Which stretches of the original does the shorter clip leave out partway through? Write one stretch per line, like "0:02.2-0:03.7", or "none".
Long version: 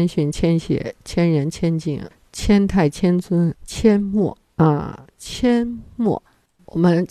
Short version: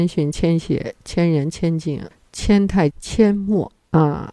0:02.9-0:03.6